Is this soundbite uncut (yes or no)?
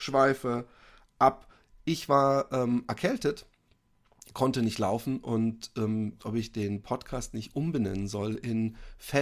no